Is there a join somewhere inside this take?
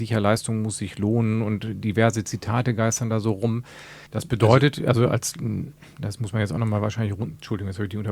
yes; 1 cut; at 4.1 s

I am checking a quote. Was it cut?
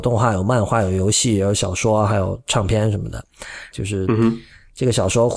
yes; 1 cut; at 3.7 s

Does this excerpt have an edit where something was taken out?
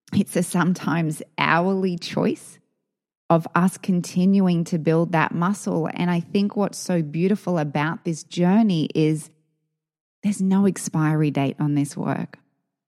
no; 0 cuts

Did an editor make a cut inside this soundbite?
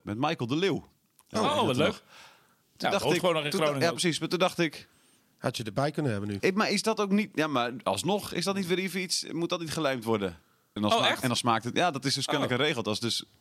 yes; 2 cuts; at 6.4 s, 10.8 s

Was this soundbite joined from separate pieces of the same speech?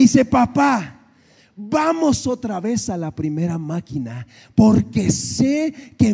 no; 0 cuts

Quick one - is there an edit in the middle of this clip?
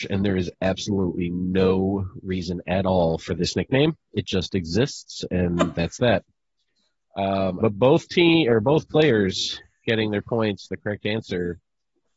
yes; 1 cut; at 7.6 s

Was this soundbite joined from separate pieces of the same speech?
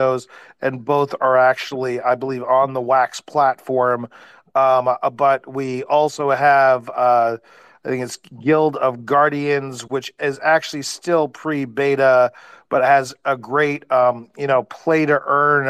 no; 0 cuts

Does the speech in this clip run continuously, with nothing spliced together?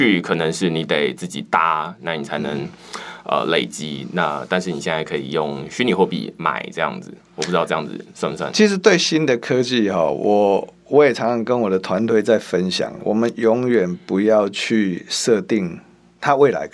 yes; 0 cuts

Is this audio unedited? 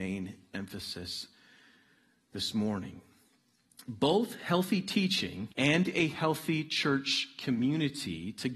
no; 1 cut; at 5.5 s

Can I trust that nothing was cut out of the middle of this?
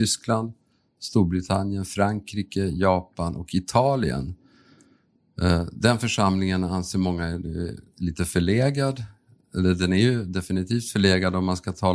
yes; 0 cuts

